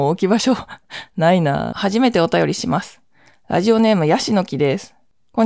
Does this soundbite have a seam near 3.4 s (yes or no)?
no